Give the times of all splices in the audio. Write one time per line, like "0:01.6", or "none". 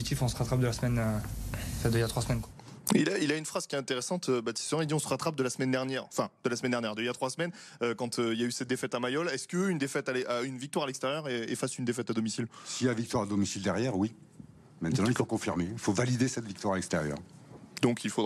none